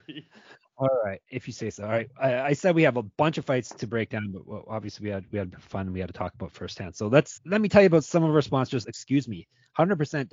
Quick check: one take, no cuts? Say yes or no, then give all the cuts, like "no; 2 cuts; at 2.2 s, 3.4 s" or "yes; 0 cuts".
no; 2 cuts; at 7.4 s, 8.8 s